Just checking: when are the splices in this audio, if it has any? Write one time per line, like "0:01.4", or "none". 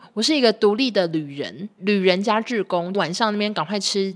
0:01.8
0:02.9